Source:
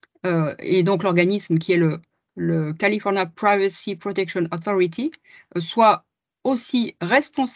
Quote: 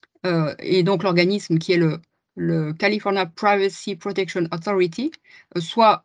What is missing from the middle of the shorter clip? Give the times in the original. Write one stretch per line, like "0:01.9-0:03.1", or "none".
none